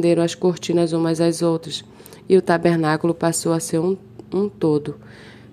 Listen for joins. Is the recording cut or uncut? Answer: uncut